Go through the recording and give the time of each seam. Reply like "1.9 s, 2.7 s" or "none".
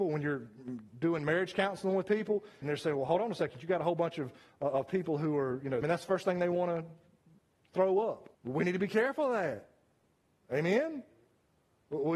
2.6 s, 5.8 s, 8.3 s